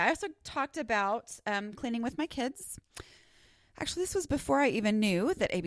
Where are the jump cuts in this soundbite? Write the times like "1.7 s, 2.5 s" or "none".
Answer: none